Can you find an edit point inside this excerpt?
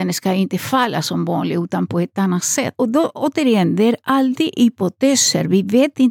no; 0 cuts

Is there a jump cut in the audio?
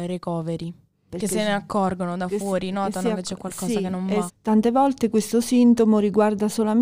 yes; 2 cuts; at 1.1 s, 4.3 s

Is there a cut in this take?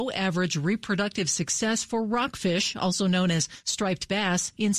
no; 0 cuts

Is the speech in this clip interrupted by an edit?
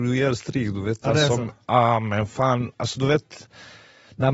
no; 0 cuts

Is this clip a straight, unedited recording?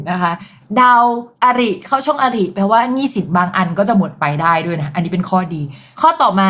no; 1 cut; at 1.3 s

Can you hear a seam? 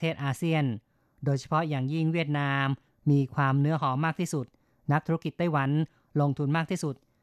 no; 0 cuts

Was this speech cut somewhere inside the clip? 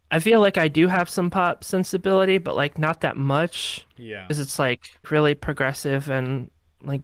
yes; 1 cut; at 5.0 s

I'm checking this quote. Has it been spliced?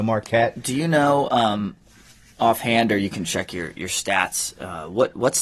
no; 0 cuts

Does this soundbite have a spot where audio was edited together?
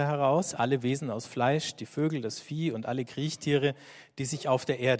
no; 0 cuts

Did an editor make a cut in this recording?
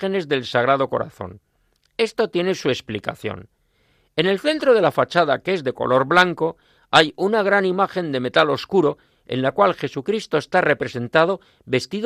no; 0 cuts

